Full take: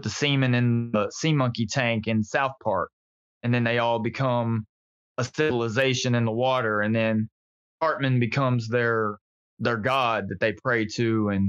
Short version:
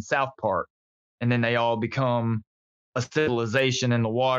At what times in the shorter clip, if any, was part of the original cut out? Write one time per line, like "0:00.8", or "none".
none